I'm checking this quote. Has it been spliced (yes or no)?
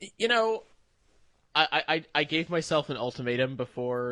no